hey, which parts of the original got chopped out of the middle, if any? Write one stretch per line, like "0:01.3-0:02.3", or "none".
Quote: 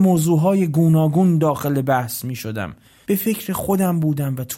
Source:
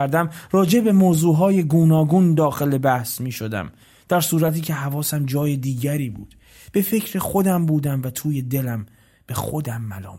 0:04.0-0:06.7